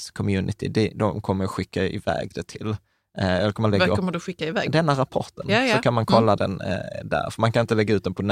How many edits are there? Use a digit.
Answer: 0